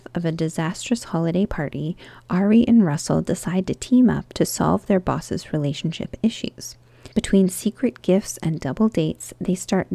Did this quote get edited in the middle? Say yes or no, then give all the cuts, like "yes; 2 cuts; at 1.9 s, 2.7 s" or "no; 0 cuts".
yes; 1 cut; at 7.1 s